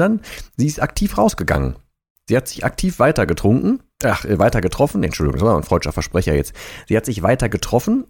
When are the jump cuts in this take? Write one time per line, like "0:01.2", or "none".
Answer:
none